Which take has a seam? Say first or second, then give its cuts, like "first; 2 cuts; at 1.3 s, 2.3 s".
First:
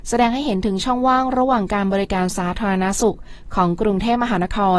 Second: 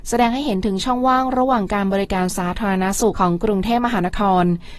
second; 1 cut; at 3.1 s